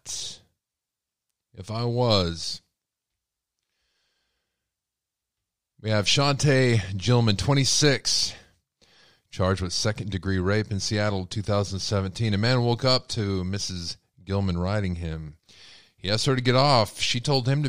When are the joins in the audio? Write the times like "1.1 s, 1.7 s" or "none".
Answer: none